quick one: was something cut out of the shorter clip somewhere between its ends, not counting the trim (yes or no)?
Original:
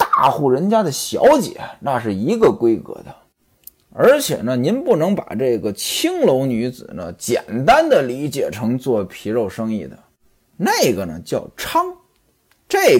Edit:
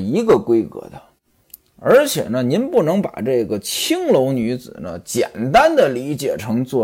no